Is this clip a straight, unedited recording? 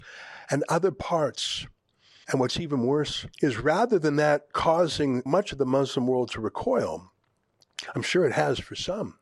no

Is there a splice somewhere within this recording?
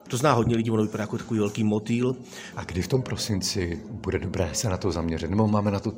yes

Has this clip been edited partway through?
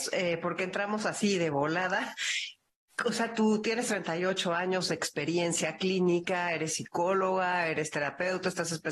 no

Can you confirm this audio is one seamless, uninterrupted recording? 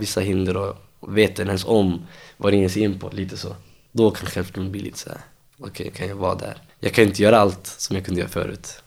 no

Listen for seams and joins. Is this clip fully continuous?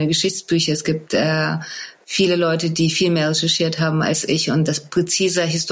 yes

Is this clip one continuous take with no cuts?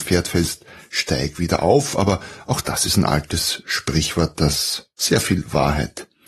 yes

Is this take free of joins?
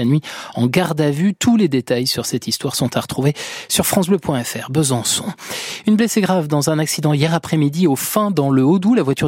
yes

